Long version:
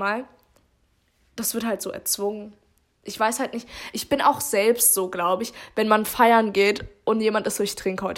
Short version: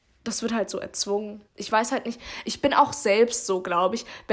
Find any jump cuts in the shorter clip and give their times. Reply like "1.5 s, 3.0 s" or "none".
1.5 s